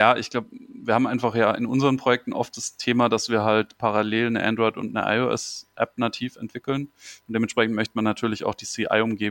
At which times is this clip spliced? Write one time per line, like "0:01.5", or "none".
none